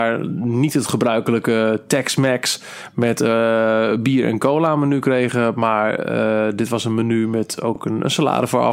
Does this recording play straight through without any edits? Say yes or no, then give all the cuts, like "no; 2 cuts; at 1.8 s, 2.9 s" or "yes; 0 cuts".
yes; 0 cuts